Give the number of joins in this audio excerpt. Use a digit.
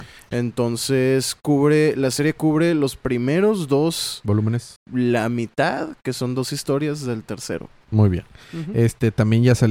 1